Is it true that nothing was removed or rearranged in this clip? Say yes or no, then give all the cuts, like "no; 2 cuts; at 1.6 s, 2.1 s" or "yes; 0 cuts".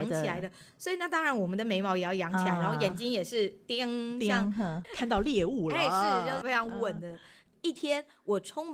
no; 1 cut; at 6.4 s